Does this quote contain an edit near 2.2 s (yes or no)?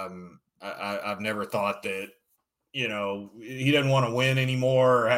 no